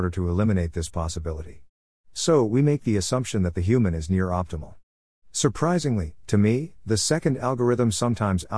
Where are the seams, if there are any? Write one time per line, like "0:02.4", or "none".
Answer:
0:05.1